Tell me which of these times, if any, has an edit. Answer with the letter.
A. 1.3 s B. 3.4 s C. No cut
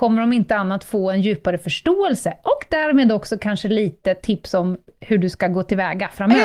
C